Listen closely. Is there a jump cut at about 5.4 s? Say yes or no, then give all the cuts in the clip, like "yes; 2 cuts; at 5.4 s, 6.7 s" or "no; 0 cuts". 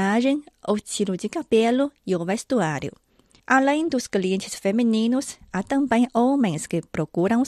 no; 1 cut; at 3.4 s